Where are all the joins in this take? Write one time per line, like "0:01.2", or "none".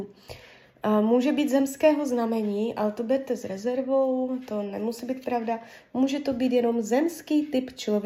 none